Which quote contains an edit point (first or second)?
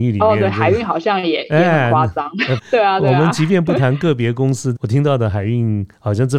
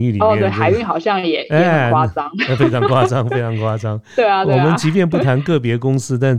first